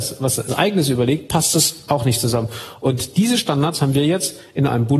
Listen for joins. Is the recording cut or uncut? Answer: uncut